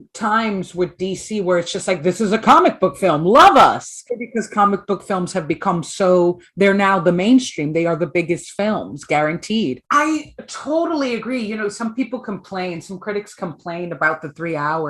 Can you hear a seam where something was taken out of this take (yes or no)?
yes